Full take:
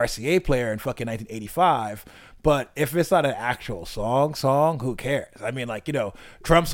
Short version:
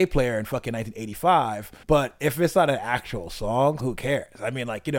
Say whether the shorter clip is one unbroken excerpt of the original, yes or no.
no